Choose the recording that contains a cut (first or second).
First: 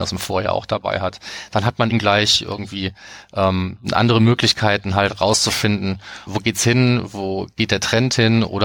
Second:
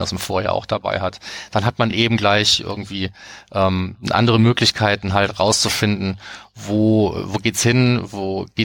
first